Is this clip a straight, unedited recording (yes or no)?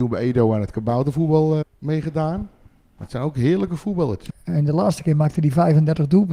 no